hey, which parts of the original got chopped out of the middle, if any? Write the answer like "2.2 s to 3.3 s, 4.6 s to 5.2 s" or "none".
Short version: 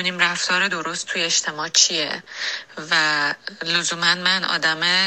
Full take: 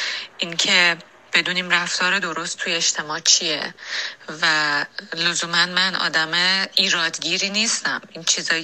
none